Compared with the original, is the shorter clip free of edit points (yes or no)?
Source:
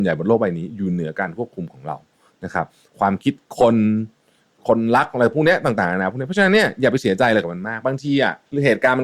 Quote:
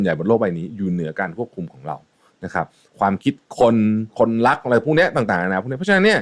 no